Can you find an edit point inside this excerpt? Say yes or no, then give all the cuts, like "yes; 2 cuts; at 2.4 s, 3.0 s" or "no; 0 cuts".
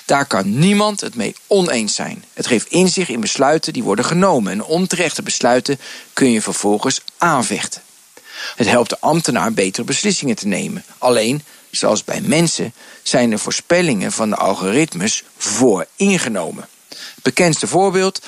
yes; 1 cut; at 8.6 s